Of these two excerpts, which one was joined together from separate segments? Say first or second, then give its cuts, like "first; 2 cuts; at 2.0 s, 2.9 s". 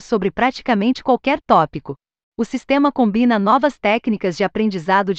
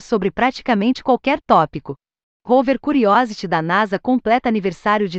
second; 1 cut; at 2.3 s